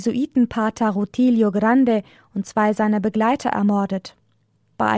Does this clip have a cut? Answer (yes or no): no